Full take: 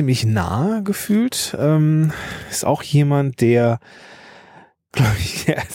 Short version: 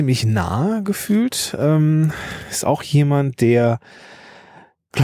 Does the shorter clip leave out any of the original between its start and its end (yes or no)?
no